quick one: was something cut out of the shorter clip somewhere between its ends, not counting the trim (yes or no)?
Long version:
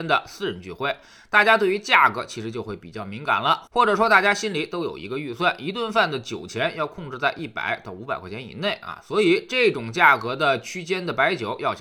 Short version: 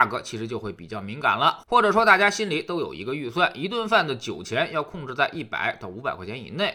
no